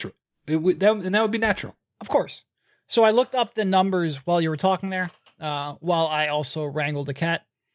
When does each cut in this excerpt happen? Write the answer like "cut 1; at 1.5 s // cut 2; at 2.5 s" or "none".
none